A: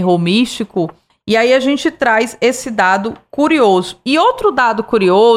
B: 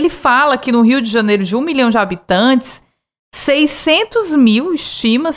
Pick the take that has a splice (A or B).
A